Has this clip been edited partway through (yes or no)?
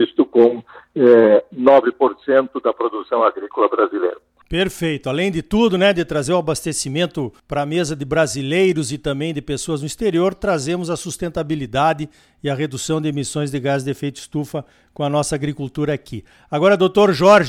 yes